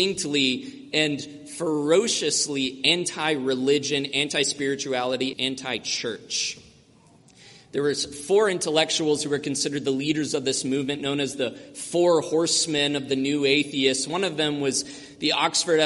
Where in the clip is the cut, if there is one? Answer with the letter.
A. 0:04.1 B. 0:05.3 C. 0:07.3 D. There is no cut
B